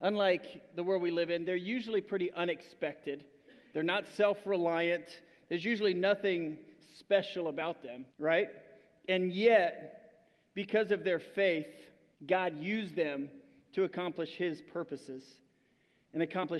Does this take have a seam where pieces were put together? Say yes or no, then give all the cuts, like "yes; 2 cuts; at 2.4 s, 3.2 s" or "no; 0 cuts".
yes; 2 cuts; at 8.1 s, 12.1 s